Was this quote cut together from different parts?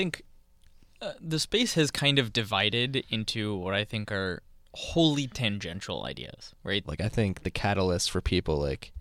yes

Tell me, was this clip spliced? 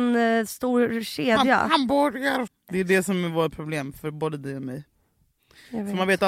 yes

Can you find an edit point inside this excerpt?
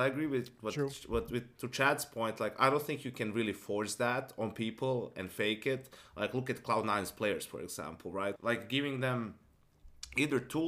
yes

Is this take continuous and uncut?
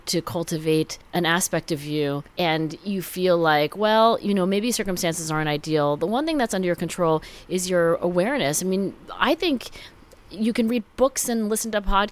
yes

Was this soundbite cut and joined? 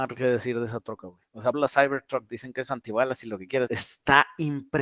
yes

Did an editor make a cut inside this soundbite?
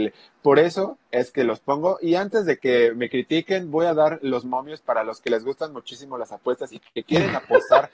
no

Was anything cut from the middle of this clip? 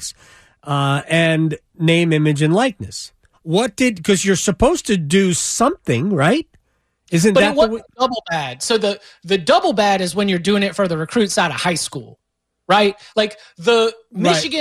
yes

